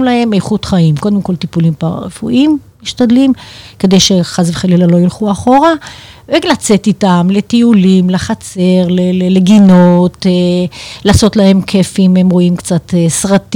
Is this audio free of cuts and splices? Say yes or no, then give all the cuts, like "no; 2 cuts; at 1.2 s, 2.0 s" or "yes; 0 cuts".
yes; 0 cuts